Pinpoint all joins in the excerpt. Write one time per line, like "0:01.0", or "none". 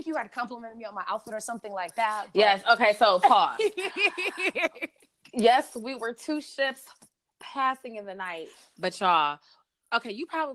none